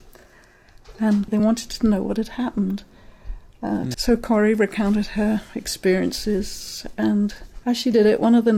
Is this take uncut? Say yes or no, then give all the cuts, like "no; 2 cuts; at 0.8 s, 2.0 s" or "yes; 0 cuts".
no; 2 cuts; at 1.3 s, 3.9 s